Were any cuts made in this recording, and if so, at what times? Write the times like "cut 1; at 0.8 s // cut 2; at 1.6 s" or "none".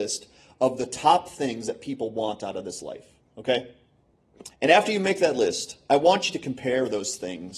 cut 1; at 4.5 s